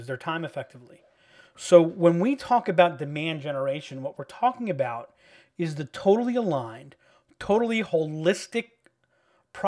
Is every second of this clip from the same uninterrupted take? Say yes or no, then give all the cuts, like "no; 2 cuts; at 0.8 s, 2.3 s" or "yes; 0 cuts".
yes; 0 cuts